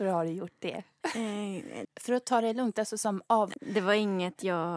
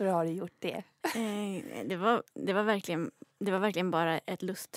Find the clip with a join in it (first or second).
first